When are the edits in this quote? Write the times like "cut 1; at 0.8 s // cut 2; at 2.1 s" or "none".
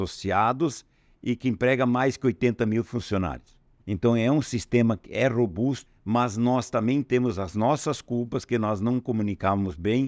cut 1; at 3.8 s // cut 2; at 5.9 s